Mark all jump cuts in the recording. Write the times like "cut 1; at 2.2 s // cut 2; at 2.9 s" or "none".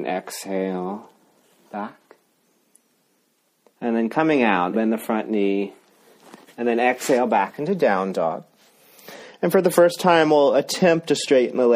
cut 1; at 4.7 s